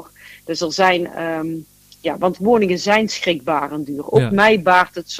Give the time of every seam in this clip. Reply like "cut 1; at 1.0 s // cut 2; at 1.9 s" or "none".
none